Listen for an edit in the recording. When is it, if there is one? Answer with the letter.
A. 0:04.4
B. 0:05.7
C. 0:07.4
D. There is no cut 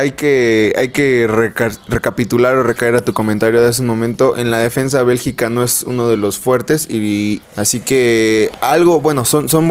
C